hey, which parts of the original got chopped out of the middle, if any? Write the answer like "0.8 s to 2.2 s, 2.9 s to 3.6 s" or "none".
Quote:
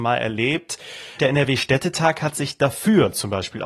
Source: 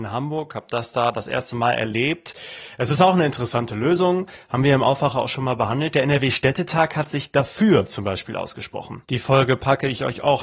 2.7 s to 5.9 s